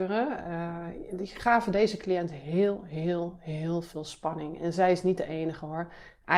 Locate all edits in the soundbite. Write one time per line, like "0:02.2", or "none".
none